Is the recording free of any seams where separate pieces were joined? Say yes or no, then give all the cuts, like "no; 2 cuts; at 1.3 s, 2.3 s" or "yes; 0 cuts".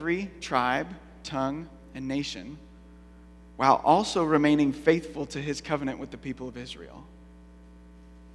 yes; 0 cuts